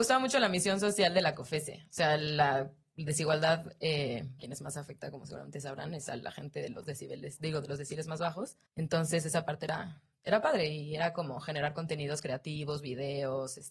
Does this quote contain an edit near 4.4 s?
yes; 2 cuts; at 4.4 s, 8.7 s

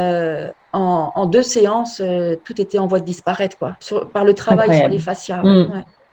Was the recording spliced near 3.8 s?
yes; 1 cut; at 3.8 s

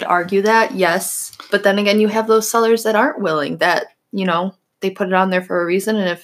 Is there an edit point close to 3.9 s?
no; 0 cuts

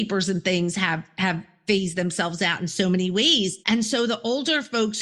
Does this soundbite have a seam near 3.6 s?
yes; 1 cut; at 3.6 s

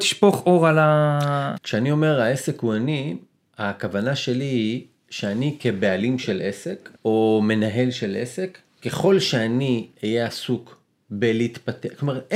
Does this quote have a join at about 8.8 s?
no; 2 cuts; at 1.6 s, 7.0 s

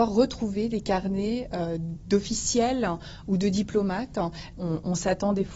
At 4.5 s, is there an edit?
yes; 1 cut; at 4.5 s

